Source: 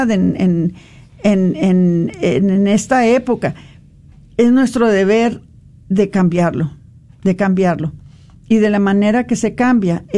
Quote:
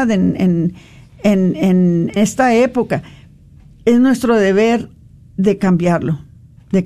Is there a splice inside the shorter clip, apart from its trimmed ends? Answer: yes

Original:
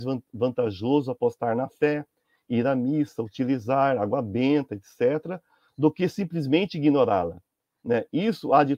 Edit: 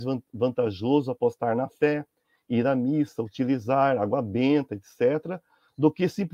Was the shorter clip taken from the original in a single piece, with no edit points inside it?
yes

